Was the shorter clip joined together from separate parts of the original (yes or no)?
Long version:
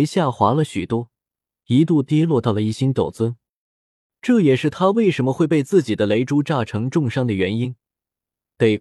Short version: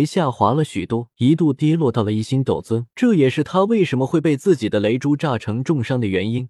yes